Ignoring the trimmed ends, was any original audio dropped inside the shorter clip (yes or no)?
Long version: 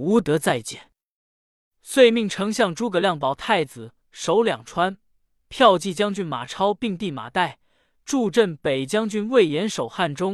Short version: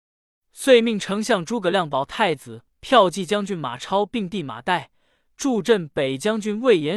yes